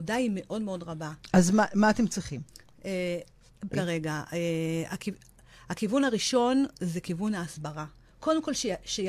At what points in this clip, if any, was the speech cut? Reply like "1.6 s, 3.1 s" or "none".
3.7 s

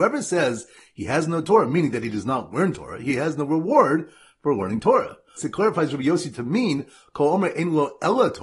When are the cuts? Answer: 5.4 s

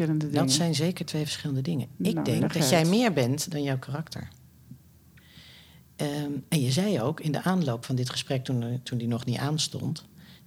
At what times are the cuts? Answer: none

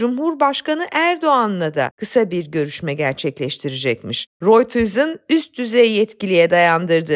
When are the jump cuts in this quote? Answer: none

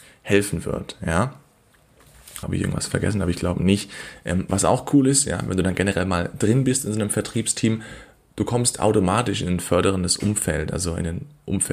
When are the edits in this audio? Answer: 2.4 s

